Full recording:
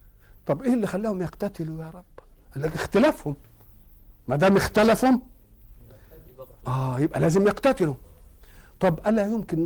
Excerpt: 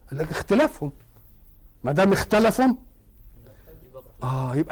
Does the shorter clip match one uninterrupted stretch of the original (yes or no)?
yes